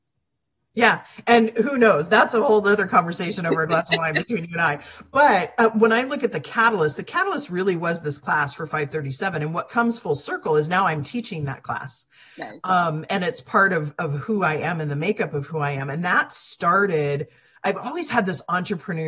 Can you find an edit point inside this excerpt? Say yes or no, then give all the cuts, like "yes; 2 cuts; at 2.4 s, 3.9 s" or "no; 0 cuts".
no; 0 cuts